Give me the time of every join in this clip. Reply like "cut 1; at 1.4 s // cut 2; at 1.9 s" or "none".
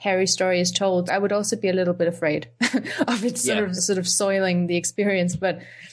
cut 1; at 1.1 s // cut 2; at 3.8 s